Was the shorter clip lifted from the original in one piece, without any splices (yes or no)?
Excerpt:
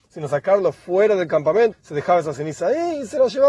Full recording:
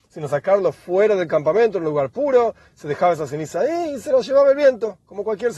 no